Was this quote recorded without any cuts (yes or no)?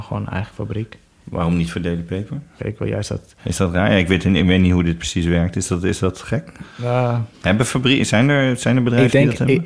no